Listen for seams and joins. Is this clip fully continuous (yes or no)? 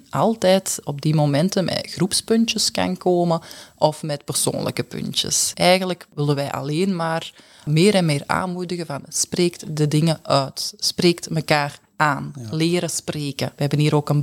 yes